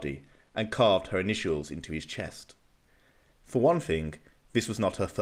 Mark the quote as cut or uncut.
cut